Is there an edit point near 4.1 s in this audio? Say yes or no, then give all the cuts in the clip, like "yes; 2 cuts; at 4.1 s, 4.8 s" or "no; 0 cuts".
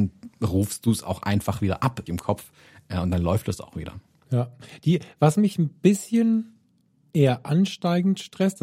no; 1 cut; at 2.1 s